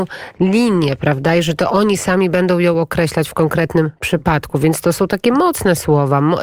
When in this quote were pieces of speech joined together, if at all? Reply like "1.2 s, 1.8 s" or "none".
none